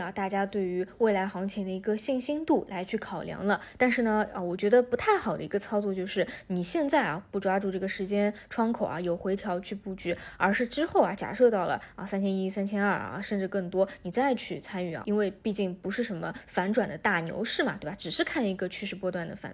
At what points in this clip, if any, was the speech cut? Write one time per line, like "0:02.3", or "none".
0:15.0